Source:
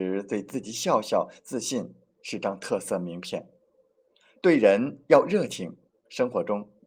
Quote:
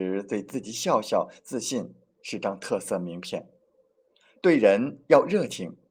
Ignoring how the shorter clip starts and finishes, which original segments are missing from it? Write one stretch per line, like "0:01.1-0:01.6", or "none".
none